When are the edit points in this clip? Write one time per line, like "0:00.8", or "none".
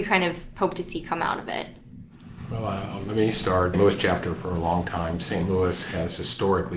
0:03.7